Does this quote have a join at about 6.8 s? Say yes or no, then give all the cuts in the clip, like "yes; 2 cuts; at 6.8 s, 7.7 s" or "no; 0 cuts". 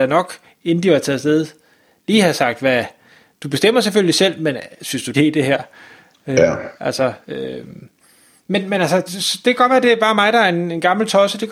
no; 2 cuts; at 5.1 s, 9.1 s